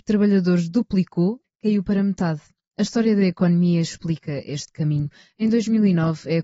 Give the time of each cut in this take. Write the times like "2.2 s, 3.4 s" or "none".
1.4 s